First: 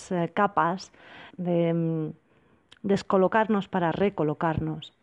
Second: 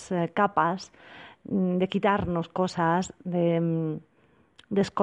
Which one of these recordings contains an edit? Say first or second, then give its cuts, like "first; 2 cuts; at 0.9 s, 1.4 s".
first; 1 cut; at 1.3 s